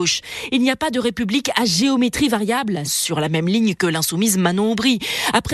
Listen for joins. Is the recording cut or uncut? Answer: cut